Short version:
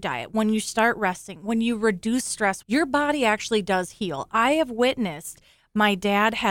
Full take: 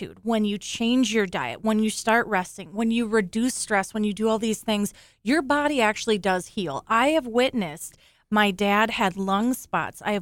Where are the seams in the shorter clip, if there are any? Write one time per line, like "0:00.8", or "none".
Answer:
0:02.6